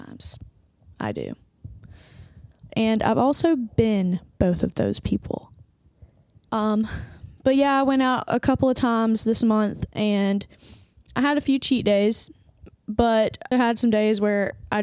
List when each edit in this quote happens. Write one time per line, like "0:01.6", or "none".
0:02.7
0:06.5
0:13.5